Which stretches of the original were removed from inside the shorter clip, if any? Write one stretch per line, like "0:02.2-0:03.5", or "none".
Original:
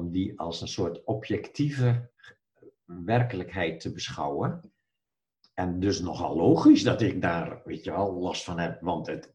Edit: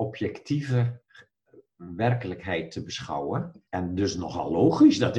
0:04.8-0:05.5